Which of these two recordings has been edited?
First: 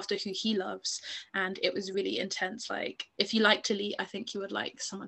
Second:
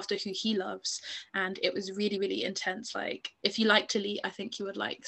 first; 1 cut; at 1.9 s

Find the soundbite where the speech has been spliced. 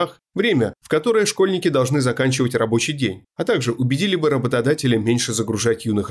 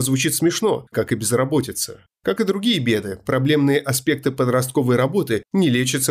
second; 1 cut; at 0.9 s

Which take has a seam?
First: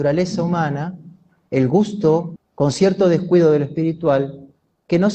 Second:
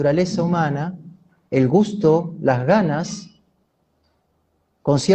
first; 1 cut; at 2.4 s

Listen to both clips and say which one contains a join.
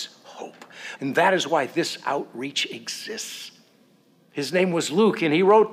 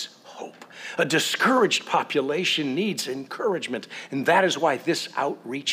first; 2 cuts; at 1.0 s, 4.3 s

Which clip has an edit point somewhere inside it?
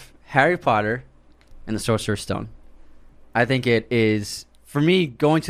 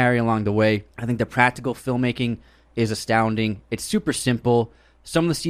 second; 1 cut; at 0.9 s

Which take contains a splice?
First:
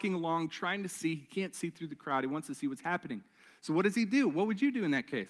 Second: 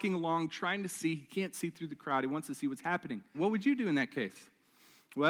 second; 1 cut; at 3.3 s

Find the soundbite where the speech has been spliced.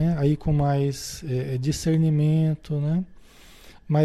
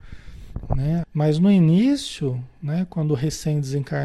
second; 1 cut; at 1.0 s

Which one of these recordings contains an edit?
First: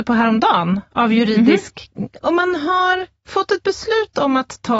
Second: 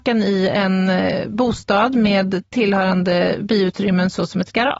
first; 1 cut; at 2.2 s

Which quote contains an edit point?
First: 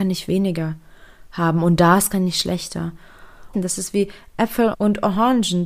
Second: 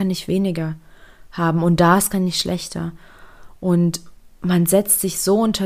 first; 2 cuts; at 3.5 s, 4.7 s

